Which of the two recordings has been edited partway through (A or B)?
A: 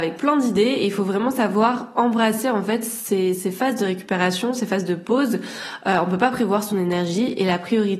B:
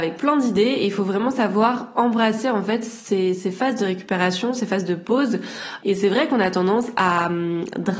B